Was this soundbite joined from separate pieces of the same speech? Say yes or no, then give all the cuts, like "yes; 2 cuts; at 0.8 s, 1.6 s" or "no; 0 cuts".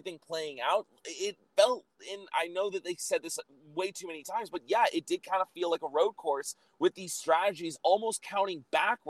no; 0 cuts